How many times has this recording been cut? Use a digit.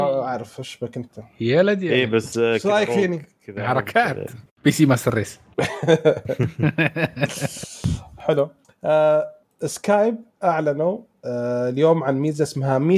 0